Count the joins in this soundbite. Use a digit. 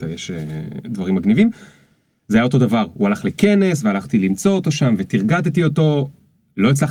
0